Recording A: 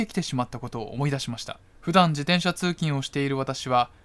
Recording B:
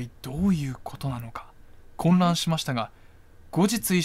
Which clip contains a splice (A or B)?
A